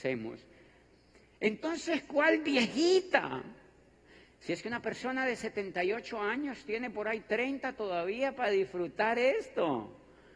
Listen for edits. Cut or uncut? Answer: uncut